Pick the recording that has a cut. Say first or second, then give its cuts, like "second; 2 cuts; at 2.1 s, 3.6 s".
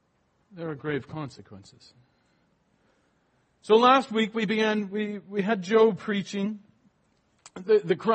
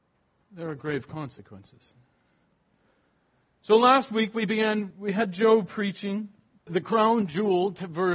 second; 2 cuts; at 4.9 s, 6.7 s